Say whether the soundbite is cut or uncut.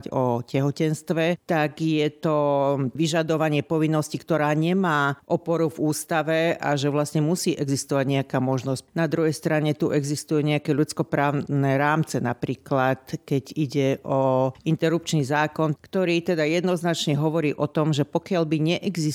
cut